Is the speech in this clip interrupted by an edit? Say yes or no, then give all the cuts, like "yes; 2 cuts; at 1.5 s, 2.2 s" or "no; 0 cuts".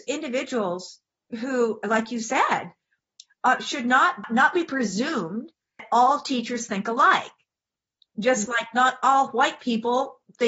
no; 0 cuts